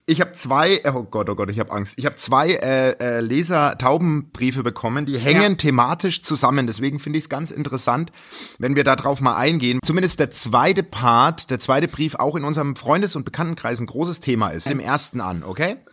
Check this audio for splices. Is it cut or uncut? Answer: cut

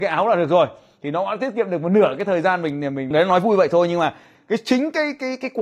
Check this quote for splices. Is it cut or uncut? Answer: cut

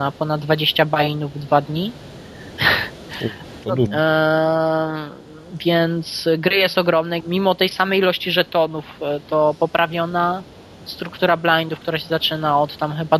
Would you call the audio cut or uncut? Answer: cut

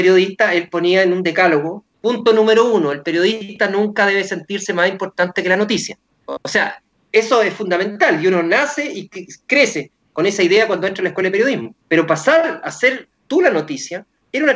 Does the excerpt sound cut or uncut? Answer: cut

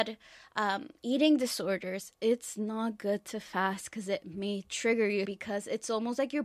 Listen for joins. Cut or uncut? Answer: cut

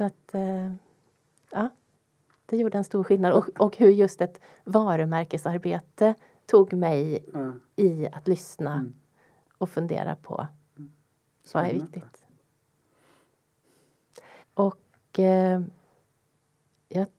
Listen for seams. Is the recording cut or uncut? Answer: cut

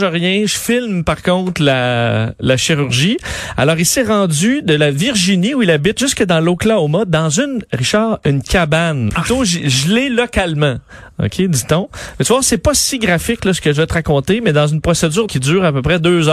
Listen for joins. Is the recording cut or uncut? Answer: cut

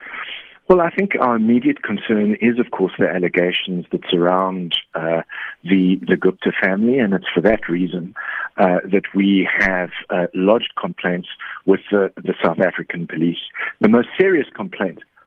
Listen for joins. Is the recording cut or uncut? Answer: uncut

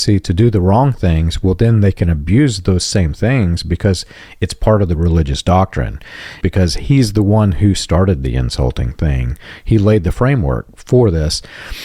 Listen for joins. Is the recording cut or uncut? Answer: cut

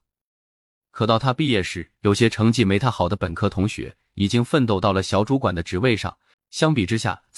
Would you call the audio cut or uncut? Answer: cut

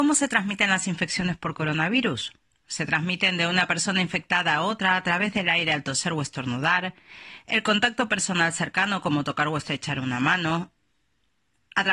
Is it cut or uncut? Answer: uncut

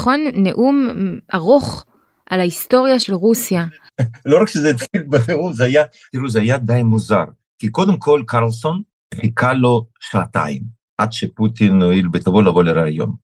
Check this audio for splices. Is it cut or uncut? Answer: uncut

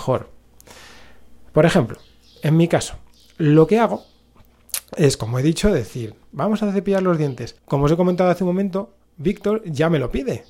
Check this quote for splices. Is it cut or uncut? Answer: cut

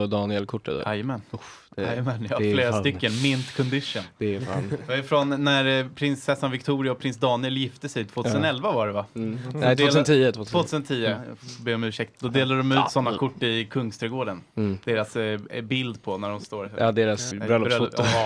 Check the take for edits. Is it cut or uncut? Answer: cut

